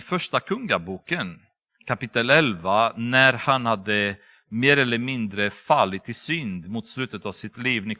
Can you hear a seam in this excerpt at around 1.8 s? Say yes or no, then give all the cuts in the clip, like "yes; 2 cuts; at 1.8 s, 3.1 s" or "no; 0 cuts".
no; 0 cuts